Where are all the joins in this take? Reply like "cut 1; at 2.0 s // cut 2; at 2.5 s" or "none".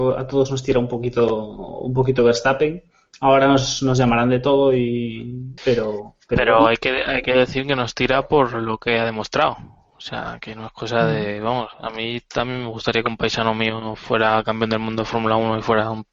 cut 1; at 5.6 s